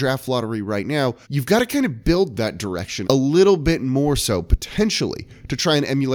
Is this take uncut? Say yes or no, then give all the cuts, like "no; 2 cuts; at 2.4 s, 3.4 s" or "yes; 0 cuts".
no; 2 cuts; at 1.2 s, 3.0 s